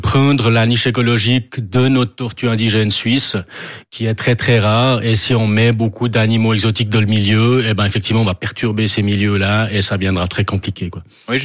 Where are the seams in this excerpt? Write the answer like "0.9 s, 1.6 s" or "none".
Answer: none